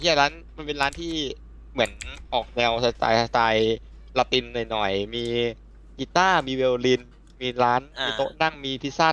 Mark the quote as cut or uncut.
uncut